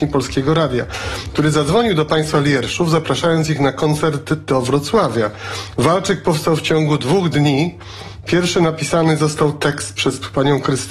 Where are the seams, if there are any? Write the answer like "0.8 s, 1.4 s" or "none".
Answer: 5.8 s